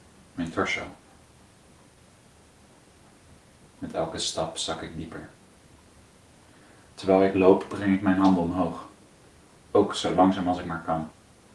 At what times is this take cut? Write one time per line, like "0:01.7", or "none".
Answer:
none